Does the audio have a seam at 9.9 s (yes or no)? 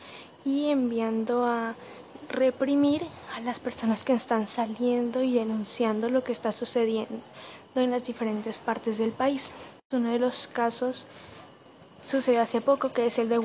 yes